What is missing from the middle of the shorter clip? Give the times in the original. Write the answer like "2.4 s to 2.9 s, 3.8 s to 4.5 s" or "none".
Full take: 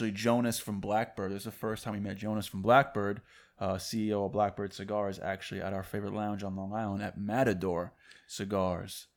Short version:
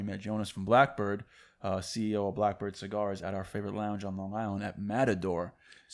5.2 s to 5.6 s